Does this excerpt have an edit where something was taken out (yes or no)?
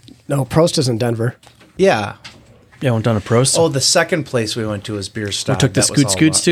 yes